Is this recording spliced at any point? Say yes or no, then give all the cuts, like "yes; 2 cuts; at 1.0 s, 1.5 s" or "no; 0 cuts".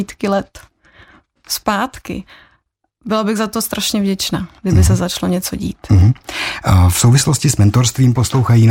no; 0 cuts